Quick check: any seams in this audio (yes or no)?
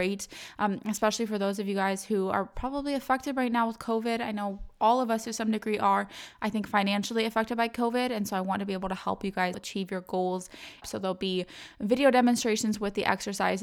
yes